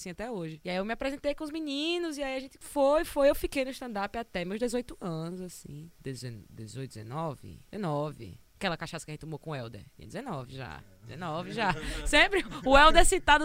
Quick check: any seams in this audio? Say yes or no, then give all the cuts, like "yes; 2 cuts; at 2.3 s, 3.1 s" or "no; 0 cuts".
no; 0 cuts